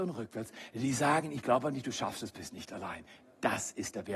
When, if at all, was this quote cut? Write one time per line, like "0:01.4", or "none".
none

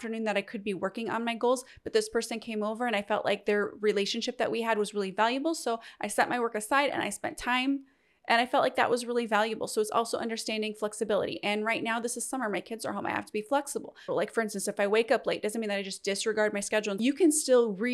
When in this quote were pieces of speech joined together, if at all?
0:14.1

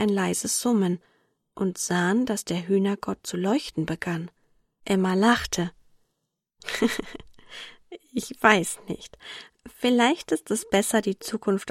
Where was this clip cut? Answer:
0:04.8

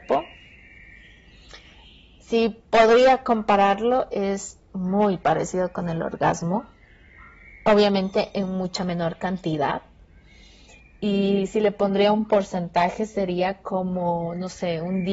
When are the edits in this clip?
none

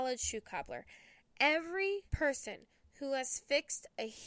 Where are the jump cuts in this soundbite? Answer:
0:02.1

